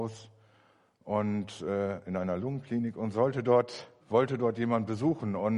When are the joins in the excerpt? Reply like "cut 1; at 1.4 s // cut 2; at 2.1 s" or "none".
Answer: cut 1; at 4.0 s